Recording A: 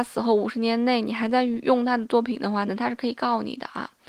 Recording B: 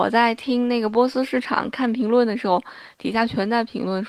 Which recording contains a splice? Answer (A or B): A